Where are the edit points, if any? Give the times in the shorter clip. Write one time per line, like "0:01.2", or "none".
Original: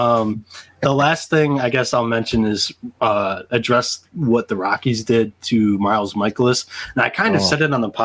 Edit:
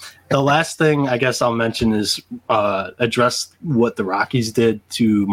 none